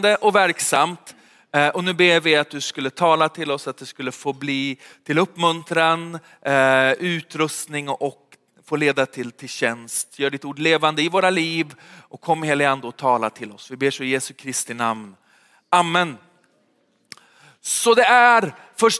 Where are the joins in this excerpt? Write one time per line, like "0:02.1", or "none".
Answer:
none